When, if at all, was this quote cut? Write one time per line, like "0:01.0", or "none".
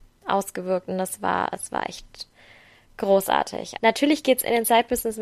0:03.8